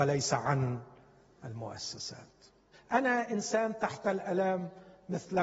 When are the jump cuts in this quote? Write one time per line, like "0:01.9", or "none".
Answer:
0:02.7